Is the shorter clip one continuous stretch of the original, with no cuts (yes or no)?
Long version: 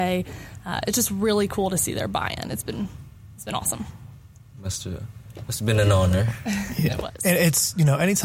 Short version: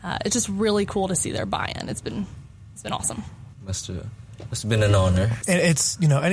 no